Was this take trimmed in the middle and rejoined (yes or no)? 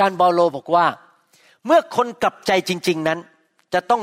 no